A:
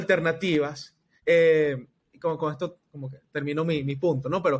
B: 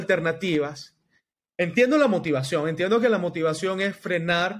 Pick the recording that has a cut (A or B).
A